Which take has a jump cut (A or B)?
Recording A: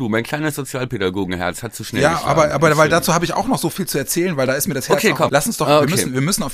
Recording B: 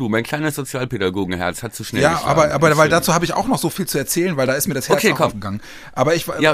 A